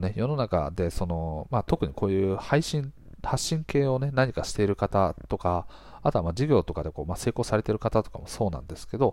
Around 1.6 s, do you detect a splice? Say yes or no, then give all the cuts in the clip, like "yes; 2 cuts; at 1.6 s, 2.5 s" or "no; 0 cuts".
no; 0 cuts